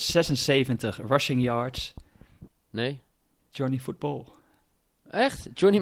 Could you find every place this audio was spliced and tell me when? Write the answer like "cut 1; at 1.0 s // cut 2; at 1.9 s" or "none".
cut 1; at 2.5 s